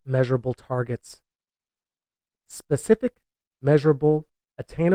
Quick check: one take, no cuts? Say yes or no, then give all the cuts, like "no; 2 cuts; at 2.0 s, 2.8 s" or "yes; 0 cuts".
no; 1 cut; at 2.3 s